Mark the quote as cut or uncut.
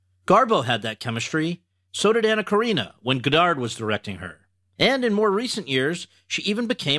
cut